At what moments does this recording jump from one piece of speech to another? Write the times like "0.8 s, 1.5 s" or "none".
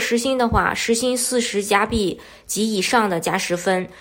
none